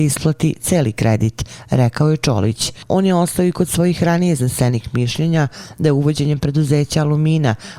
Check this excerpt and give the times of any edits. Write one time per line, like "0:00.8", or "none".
none